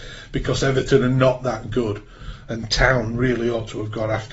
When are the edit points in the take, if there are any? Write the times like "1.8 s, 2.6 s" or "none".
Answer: none